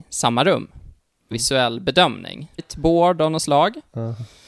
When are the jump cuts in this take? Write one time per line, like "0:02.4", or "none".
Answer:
0:01.3
0:02.6